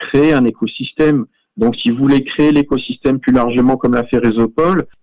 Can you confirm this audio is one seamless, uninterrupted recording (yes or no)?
yes